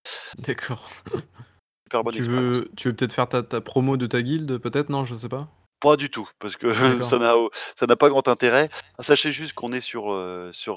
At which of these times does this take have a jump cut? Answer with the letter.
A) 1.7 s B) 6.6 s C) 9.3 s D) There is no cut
A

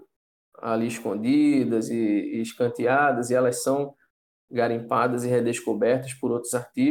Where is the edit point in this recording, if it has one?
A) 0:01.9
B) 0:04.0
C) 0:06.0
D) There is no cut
D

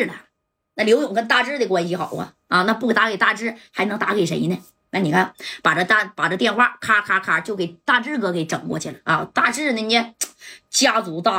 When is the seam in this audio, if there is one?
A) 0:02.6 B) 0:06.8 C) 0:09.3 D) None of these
D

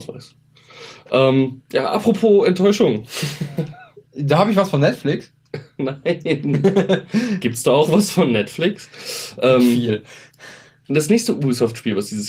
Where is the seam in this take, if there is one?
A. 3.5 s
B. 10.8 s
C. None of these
C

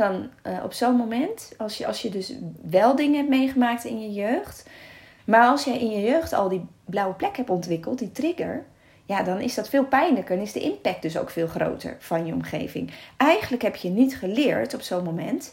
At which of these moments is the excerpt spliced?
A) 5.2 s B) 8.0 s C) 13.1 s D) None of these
A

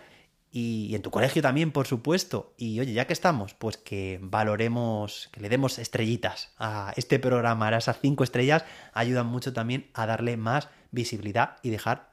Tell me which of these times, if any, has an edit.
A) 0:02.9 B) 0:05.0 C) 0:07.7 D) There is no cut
D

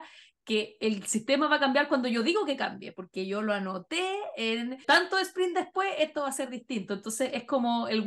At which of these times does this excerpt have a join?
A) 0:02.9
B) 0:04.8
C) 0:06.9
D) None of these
B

